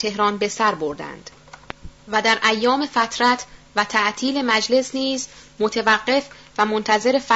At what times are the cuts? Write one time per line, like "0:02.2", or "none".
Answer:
0:02.0